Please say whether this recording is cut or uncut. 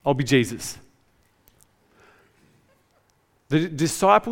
cut